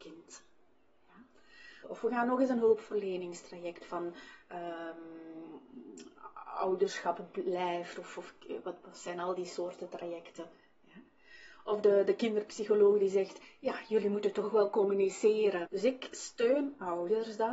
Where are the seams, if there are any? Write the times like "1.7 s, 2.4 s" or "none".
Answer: 1.8 s, 15.7 s